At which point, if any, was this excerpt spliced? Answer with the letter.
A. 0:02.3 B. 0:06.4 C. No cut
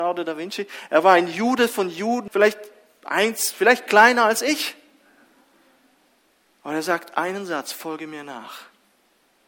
A